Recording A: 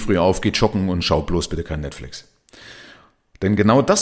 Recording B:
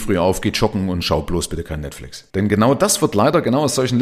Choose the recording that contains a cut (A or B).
B